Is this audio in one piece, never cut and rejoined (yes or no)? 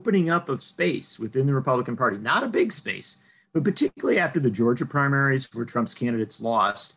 yes